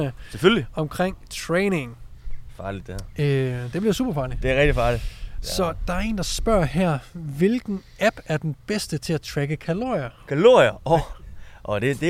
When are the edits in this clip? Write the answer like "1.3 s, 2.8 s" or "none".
none